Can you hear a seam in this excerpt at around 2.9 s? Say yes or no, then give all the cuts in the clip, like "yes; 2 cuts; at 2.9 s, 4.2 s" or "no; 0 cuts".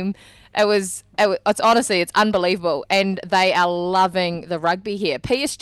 no; 0 cuts